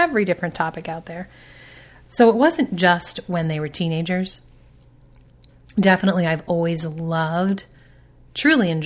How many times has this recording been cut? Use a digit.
0